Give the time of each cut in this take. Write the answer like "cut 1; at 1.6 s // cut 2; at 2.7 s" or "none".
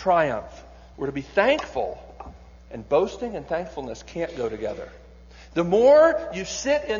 cut 1; at 0.9 s